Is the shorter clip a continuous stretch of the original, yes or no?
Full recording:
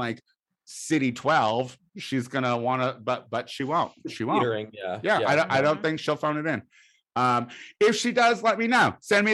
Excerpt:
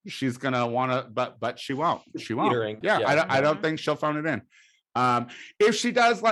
no